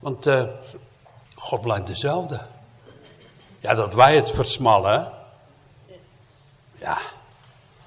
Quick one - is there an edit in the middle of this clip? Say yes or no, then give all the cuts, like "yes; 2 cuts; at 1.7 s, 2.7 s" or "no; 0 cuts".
yes; 1 cut; at 1.3 s